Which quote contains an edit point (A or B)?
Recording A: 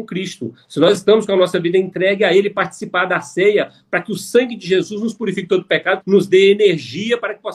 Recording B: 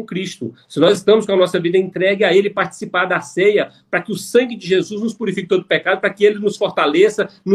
A